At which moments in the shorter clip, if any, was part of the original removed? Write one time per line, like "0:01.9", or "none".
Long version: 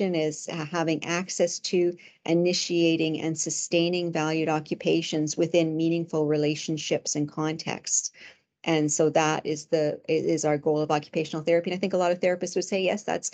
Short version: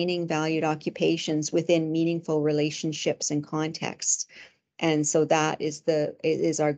none